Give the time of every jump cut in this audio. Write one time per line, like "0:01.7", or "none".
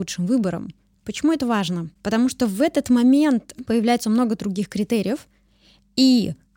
0:00.9
0:03.6